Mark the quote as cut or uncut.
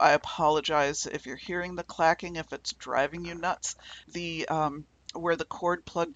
cut